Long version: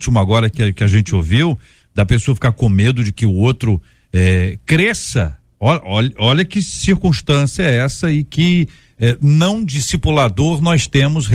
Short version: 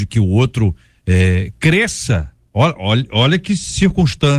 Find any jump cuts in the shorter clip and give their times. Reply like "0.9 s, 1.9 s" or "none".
none